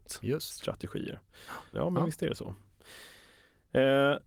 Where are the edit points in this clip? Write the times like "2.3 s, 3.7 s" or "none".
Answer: 1.7 s